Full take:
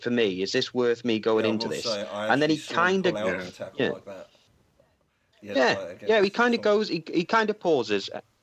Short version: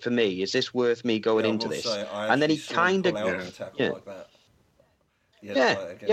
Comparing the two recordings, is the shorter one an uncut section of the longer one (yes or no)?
yes